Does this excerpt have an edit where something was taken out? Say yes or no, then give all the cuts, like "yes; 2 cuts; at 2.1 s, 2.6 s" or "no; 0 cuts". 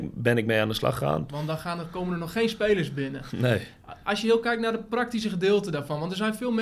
yes; 1 cut; at 1.3 s